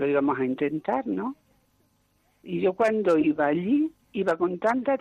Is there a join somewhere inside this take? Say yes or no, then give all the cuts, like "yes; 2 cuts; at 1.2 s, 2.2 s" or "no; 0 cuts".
yes; 1 cut; at 4.0 s